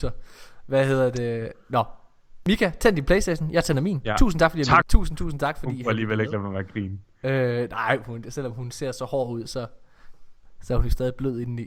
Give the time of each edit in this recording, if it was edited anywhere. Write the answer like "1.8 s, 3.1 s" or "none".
4.8 s